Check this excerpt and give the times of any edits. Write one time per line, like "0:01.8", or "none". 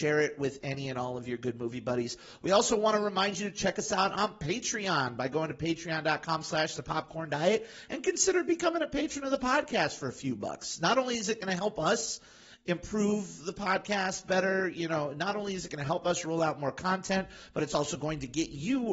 none